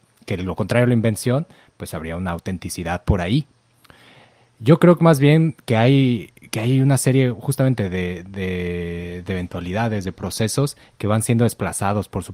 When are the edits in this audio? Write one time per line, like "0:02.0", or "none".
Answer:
none